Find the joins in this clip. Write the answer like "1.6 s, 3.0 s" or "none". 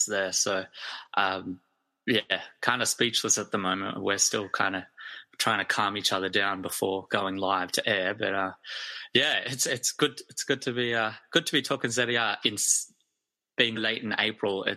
12.4 s, 13.8 s